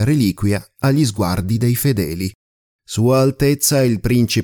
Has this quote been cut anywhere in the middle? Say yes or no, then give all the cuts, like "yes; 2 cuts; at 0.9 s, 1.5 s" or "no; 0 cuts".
yes; 1 cut; at 2.8 s